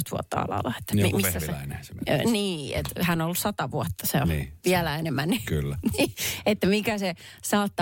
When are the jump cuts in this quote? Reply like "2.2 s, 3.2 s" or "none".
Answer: none

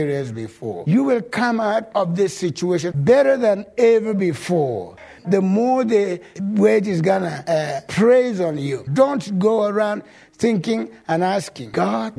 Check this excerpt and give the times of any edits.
2.9 s, 5.2 s, 8.9 s

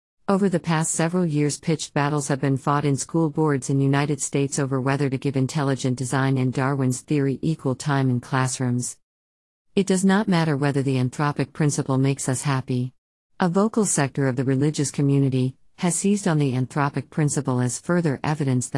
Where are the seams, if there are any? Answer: 13.3 s, 15.7 s

